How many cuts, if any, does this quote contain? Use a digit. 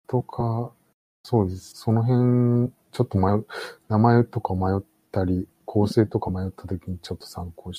1